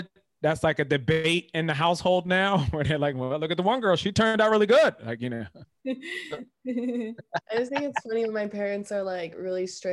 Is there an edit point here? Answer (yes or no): no